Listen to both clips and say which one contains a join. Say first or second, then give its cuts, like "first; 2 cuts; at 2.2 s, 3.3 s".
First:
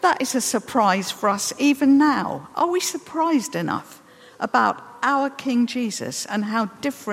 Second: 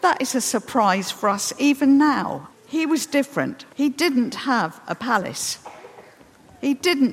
second; 2 cuts; at 2.5 s, 3.7 s